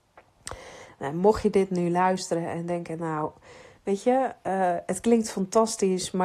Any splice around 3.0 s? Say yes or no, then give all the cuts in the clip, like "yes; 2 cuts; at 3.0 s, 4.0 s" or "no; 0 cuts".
no; 0 cuts